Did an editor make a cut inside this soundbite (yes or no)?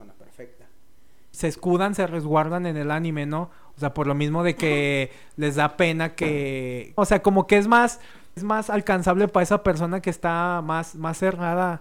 yes